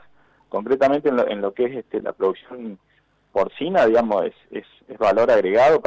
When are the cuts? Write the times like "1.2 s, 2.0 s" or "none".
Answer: 2.0 s